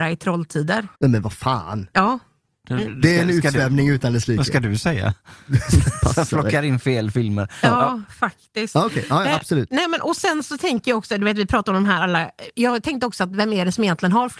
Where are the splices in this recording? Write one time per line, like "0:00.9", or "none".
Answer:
0:00.9